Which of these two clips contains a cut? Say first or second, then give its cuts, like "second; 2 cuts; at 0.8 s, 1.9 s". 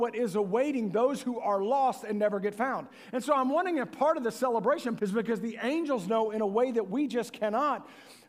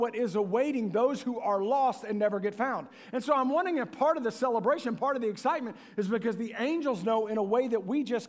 first; 1 cut; at 5.0 s